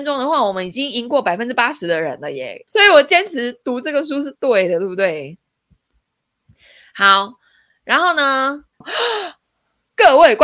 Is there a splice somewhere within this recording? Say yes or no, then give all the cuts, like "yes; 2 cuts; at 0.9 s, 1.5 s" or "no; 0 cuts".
yes; 2 cuts; at 2.7 s, 8.8 s